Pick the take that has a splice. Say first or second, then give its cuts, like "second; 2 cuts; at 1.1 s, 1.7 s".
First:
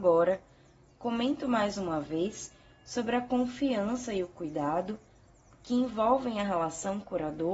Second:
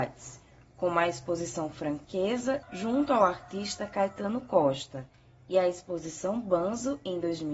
second; 1 cut; at 2.6 s